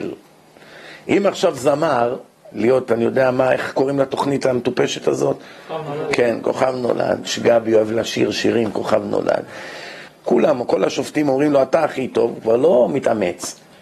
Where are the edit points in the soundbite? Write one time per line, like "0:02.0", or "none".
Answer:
0:02.5
0:10.1